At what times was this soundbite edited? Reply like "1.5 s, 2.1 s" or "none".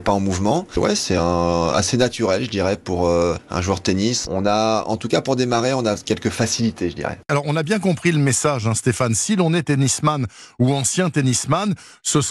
7.3 s